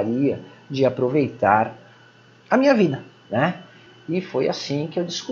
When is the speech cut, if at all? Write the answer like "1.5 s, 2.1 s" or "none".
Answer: none

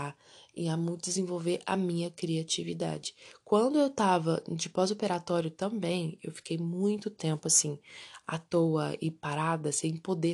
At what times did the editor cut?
none

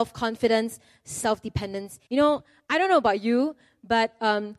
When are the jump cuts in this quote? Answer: 2.1 s

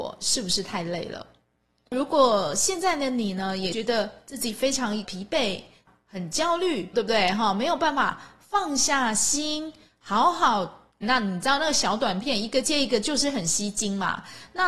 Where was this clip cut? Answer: 6.9 s, 11.0 s

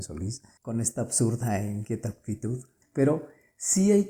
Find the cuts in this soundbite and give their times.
2.8 s

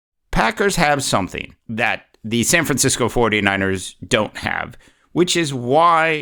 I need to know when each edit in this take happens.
1.6 s

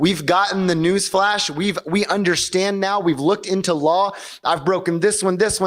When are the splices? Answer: none

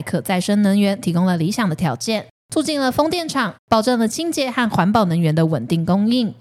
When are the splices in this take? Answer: 3.5 s

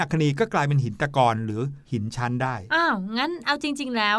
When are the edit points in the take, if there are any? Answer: 1.8 s

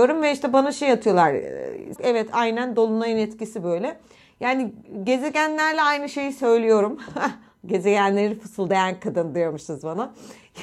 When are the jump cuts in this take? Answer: 2.0 s

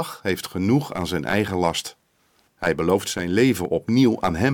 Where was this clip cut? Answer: 2.5 s

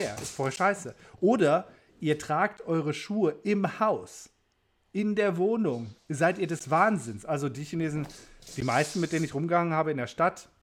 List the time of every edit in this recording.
none

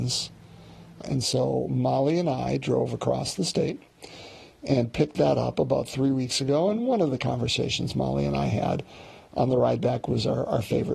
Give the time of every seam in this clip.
1.0 s

